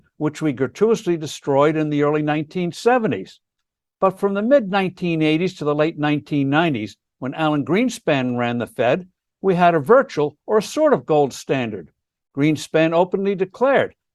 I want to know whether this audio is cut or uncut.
uncut